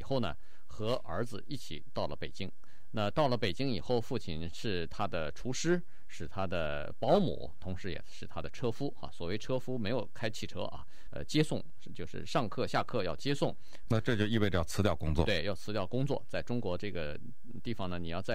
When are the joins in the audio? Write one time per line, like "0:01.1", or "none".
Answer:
0:11.1
0:13.8